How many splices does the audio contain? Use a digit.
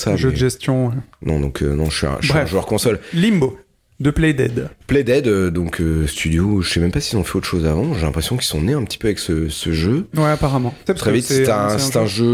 2